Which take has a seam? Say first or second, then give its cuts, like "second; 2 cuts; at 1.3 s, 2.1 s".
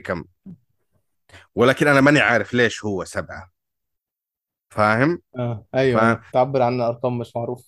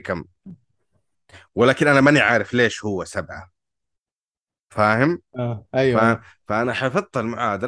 first; 1 cut; at 6.3 s